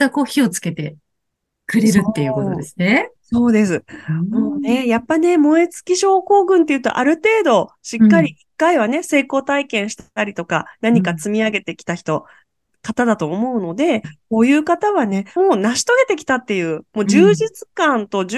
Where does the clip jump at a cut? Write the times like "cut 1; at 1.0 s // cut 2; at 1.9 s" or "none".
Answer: cut 1; at 14.0 s // cut 2; at 15.4 s